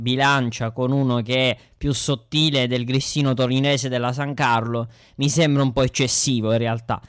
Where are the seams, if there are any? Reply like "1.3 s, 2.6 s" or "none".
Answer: none